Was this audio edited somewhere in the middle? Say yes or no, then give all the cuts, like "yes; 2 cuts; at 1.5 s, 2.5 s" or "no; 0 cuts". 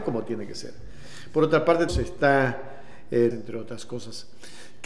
yes; 2 cuts; at 1.9 s, 3.3 s